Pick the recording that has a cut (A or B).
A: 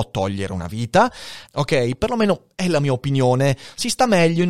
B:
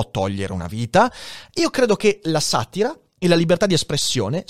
A